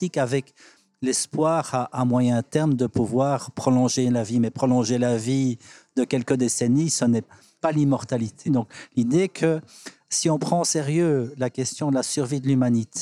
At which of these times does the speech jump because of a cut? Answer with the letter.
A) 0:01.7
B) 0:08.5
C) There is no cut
B